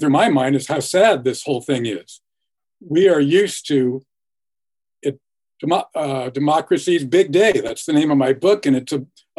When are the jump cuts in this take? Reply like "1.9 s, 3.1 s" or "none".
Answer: none